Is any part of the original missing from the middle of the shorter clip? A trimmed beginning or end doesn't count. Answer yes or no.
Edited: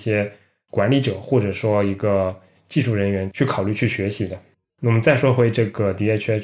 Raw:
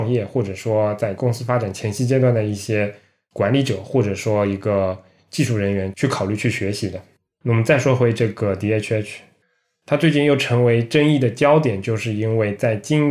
no